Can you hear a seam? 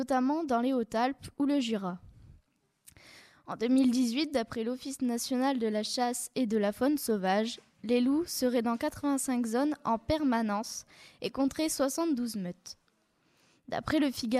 no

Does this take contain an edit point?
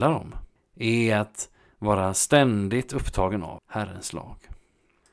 yes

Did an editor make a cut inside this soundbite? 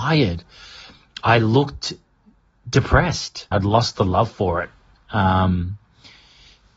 yes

